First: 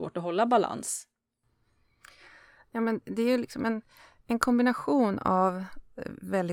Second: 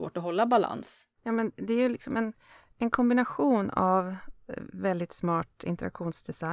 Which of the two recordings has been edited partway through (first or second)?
second